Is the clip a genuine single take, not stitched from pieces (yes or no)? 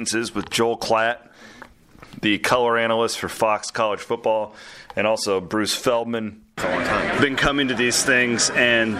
no